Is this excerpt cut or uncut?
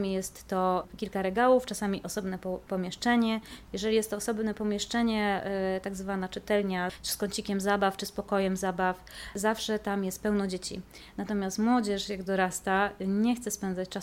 uncut